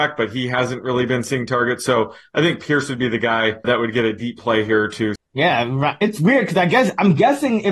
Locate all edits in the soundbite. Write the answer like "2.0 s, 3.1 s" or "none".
3.6 s, 5.2 s